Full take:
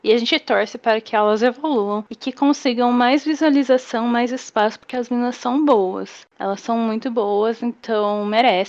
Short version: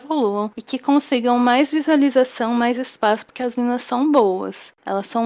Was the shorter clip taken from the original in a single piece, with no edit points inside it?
yes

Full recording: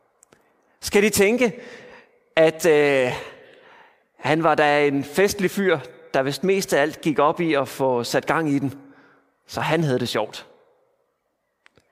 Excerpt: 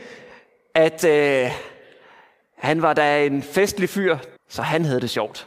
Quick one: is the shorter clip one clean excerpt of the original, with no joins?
no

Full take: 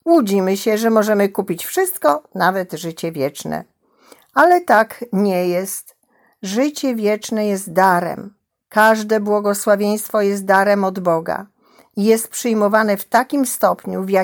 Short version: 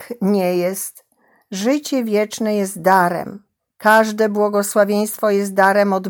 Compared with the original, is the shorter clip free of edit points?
yes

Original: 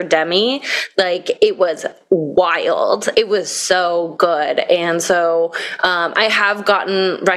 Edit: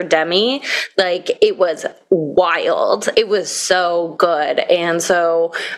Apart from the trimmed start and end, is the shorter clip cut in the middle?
no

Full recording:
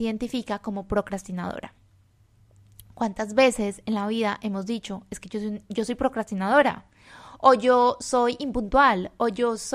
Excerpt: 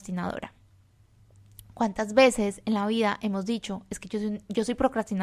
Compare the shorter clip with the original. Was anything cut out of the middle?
no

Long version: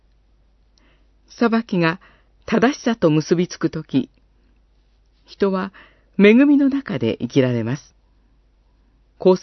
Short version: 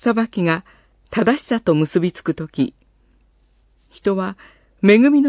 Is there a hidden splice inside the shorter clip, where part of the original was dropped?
no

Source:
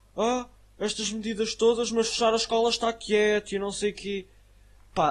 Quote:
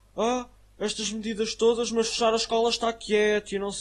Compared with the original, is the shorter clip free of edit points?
yes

